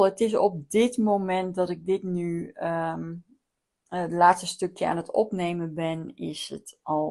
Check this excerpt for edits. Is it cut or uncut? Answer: uncut